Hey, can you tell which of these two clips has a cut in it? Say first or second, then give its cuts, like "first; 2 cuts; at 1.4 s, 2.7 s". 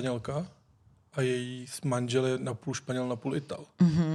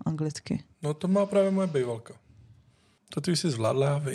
second; 1 cut; at 3.0 s